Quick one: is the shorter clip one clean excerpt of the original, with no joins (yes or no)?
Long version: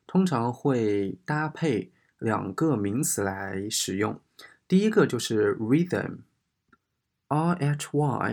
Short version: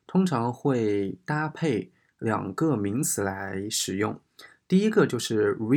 yes